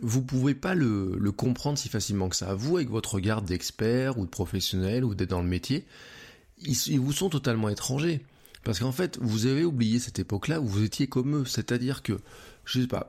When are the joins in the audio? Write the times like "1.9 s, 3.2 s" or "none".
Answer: none